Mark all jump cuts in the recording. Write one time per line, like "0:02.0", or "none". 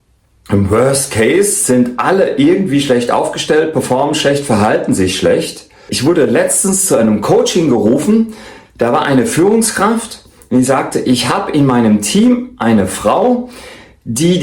0:05.9